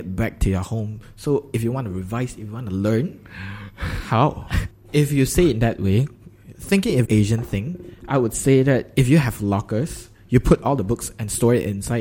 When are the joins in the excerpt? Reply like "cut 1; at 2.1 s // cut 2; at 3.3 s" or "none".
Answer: cut 1; at 4.7 s // cut 2; at 7.1 s